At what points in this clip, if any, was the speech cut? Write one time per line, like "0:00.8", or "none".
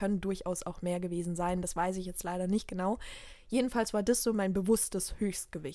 none